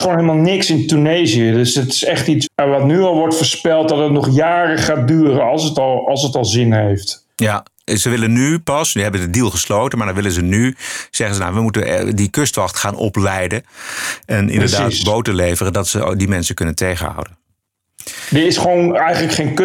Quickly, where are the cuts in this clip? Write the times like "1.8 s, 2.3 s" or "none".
2.5 s